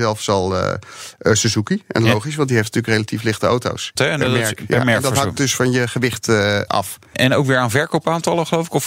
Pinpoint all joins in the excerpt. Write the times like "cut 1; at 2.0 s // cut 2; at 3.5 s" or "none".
cut 1; at 4.0 s